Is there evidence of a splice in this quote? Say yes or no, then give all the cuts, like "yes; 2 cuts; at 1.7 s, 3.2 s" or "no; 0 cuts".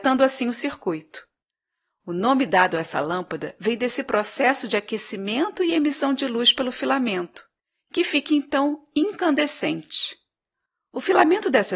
no; 0 cuts